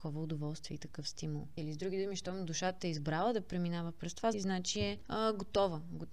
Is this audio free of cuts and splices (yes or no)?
no